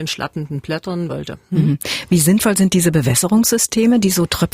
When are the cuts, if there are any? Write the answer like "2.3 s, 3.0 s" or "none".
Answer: 1.1 s